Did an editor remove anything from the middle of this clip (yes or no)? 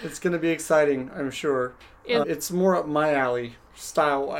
yes